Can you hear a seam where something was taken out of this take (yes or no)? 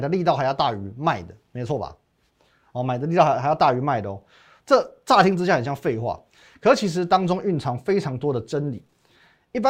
no